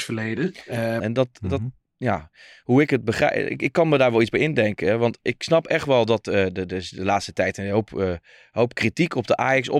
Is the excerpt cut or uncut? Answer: cut